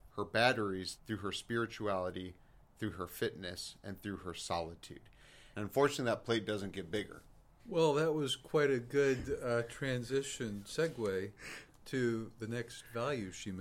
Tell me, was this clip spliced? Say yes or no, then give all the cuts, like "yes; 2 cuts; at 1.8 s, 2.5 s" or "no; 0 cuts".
yes; 3 cuts; at 1.0 s, 5.5 s, 7.6 s